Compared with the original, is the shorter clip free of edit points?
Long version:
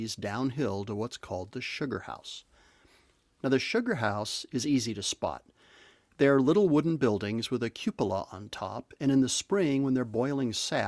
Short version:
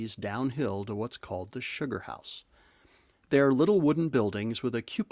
no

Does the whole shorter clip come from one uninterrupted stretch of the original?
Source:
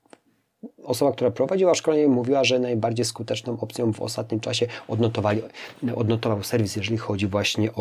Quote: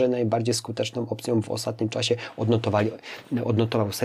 yes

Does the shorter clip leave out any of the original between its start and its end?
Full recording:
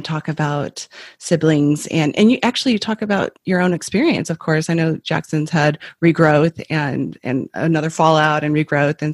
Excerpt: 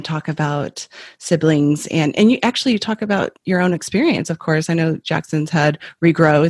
no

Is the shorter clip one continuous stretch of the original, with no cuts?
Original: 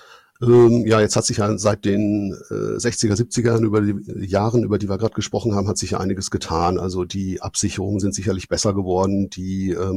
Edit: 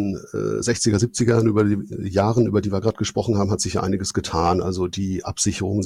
yes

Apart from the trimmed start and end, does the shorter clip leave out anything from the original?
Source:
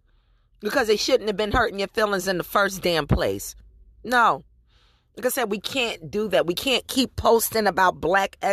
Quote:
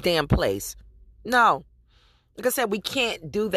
no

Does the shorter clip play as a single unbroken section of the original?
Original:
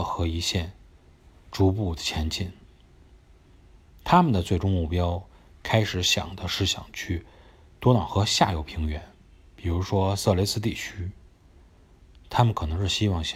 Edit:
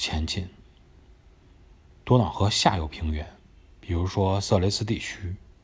no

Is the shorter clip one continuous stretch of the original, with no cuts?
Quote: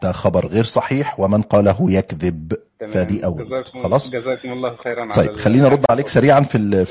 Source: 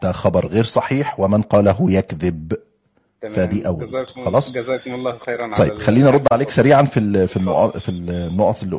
no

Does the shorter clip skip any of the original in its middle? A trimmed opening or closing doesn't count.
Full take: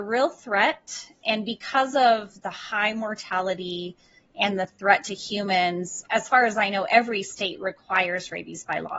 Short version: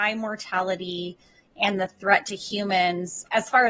no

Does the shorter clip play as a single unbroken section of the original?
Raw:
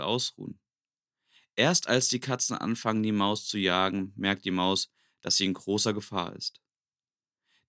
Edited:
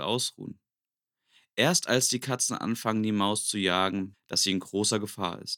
no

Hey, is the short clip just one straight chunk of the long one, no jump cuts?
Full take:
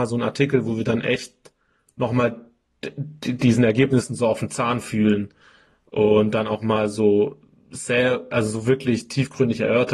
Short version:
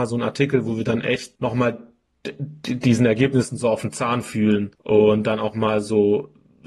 no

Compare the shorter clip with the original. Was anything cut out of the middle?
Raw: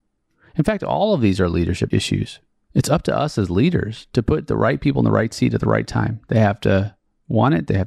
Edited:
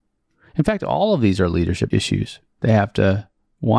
yes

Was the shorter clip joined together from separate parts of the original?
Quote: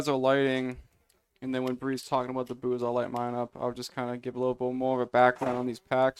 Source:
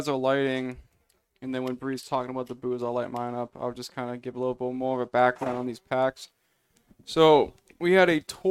no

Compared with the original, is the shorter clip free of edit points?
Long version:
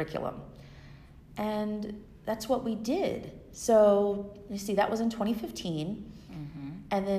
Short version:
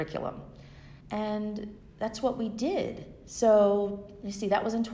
no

